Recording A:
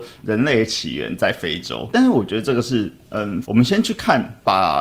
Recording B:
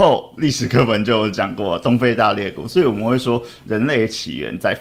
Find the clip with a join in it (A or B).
A